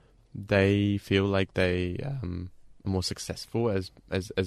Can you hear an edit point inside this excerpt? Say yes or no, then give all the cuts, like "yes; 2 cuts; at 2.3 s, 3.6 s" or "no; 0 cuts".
yes; 1 cut; at 2.8 s